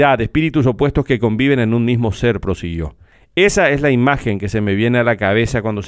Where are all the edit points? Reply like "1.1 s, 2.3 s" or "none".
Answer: none